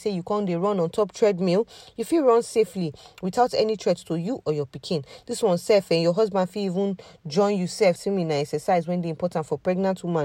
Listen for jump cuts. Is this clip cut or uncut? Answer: cut